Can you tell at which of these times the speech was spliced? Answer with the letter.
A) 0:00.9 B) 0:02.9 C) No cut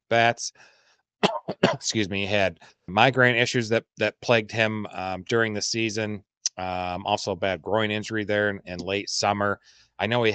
B